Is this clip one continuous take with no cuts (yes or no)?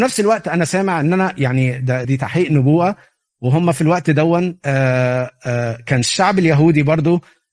no